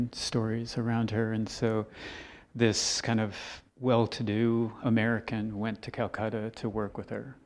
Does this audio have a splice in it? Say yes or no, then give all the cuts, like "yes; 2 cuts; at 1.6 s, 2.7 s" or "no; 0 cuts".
yes; 2 cuts; at 3.7 s, 4.8 s